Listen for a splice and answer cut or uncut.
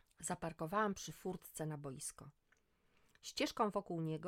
uncut